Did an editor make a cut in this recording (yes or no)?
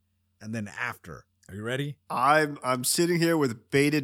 no